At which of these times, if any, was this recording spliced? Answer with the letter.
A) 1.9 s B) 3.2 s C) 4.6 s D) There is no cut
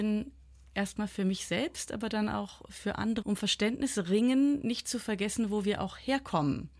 B